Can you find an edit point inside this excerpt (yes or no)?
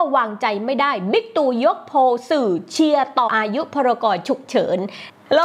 yes